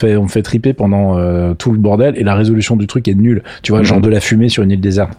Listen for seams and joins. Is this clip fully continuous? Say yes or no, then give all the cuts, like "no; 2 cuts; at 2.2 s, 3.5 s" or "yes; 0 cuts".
yes; 0 cuts